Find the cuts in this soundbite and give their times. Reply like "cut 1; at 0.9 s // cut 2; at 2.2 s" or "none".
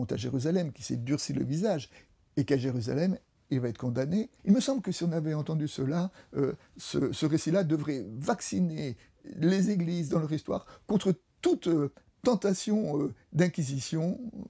cut 1; at 4.4 s